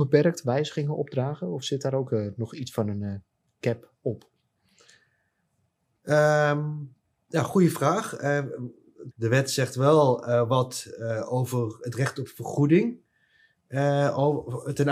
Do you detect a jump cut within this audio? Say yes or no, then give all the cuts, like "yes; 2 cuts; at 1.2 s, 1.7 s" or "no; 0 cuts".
yes; 1 cut; at 9.1 s